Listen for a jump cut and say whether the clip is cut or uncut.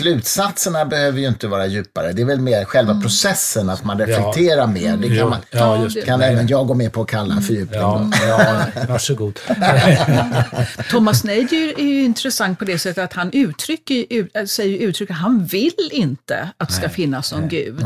uncut